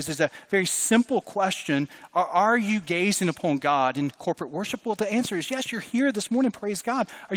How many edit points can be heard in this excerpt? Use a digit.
0